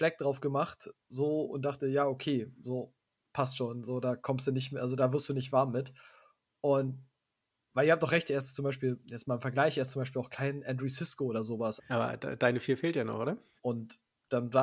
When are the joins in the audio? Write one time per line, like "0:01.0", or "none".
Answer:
0:11.8
0:13.6